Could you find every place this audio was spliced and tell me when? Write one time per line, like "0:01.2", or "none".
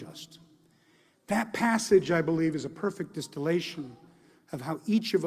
none